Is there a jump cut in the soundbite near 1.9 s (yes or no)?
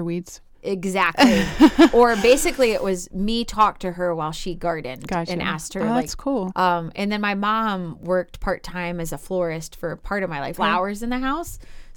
no